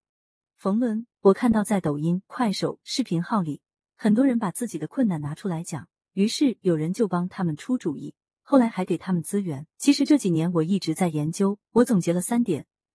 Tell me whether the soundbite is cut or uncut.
cut